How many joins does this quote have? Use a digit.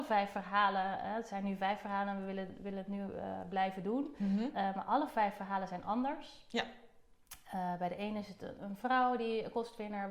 0